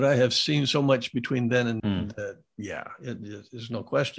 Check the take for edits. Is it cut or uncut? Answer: cut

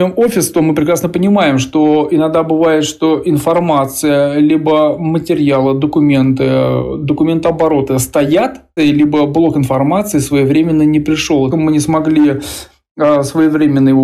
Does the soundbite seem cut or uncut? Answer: cut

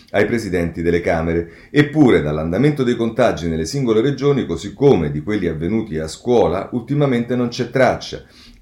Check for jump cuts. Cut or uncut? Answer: uncut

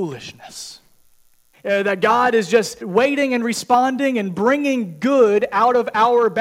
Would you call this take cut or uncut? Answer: cut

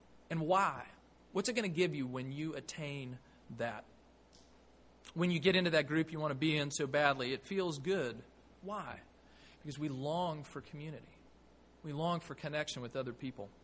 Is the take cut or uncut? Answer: uncut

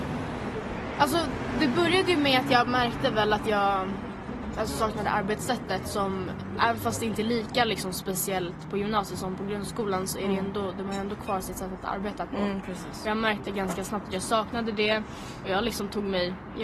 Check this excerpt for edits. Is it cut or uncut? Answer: cut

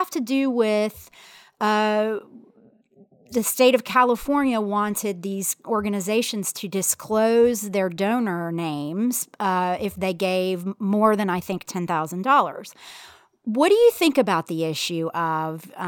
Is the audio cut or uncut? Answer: uncut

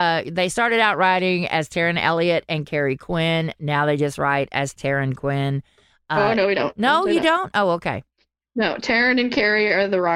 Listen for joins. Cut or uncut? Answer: cut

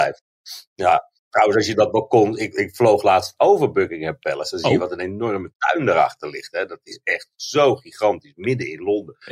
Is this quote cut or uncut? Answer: uncut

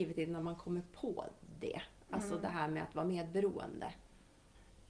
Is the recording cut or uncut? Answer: uncut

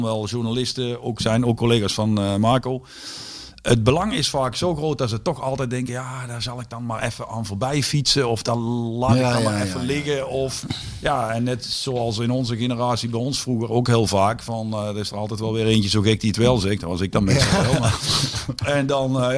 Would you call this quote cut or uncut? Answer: uncut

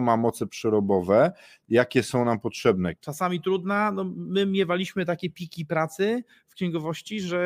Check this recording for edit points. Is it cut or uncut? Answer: cut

